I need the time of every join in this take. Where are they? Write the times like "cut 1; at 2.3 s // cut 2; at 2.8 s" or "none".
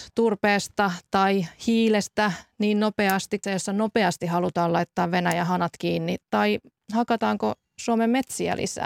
cut 1; at 3.4 s